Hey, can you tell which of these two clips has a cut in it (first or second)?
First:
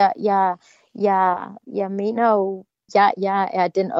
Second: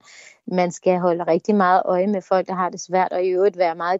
first